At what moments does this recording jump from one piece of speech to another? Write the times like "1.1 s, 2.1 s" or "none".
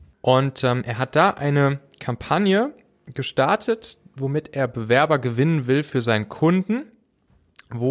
none